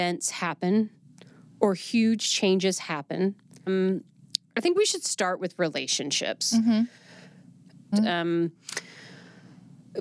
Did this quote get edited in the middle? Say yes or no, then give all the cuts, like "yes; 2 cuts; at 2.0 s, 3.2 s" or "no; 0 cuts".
yes; 2 cuts; at 3.7 s, 7.9 s